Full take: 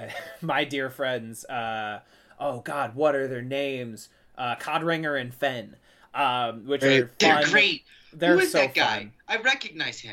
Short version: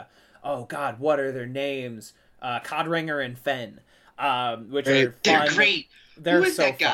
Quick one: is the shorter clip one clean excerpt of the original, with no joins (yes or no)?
yes